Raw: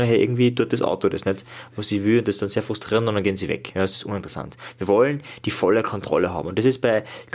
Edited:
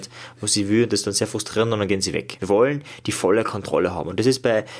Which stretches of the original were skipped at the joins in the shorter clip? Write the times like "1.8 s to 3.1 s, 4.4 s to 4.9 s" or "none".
3.7 s to 4.8 s